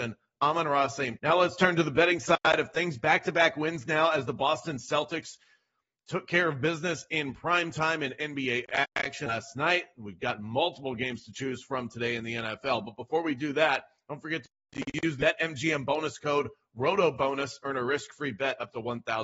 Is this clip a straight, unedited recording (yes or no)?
no